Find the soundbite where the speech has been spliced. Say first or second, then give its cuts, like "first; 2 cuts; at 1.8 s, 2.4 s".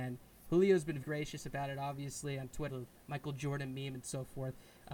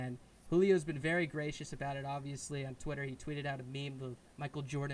first; 2 cuts; at 1.0 s, 2.7 s